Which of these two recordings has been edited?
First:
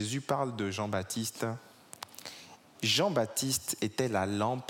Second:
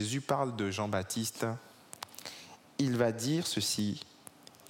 first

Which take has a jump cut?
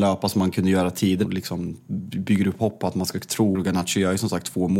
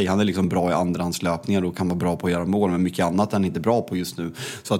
first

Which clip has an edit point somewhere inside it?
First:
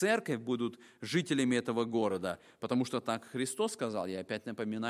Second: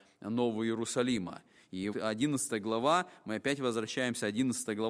second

